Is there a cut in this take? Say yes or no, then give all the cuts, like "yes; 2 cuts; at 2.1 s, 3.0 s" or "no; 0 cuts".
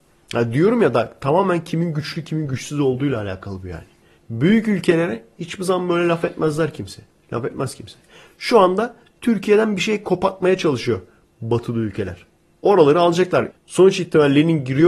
yes; 1 cut; at 13.5 s